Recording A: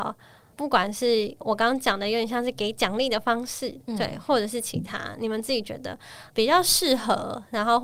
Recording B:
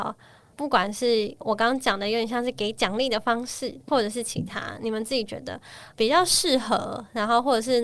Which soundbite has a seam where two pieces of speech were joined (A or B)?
B